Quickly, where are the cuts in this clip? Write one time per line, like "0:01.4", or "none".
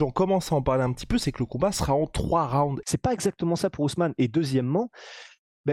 0:02.8